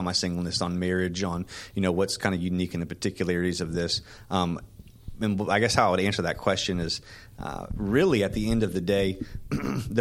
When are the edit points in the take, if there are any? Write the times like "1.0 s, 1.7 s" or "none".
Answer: none

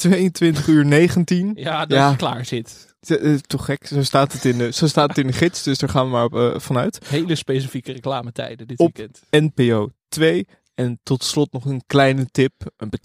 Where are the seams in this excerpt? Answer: none

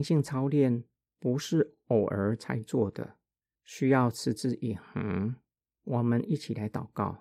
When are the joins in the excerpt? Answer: 5.7 s

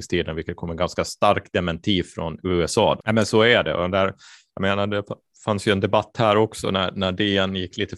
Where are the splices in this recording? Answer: 3.0 s

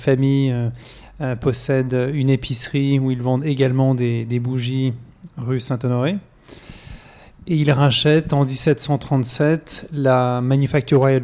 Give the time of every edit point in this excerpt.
none

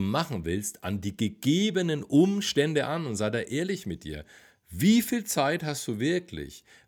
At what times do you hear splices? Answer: none

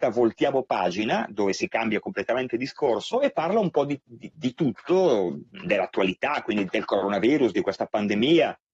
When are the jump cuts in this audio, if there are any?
6.7 s

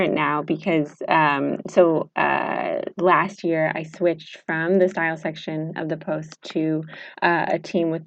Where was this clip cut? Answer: none

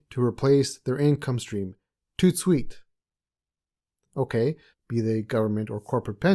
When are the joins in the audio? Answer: 4.7 s

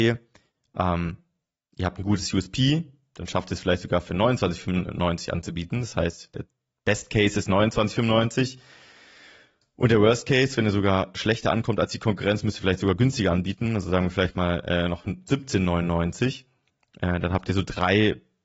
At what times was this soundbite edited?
none

